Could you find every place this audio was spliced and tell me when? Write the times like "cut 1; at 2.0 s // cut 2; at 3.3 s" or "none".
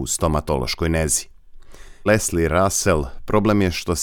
cut 1; at 2.1 s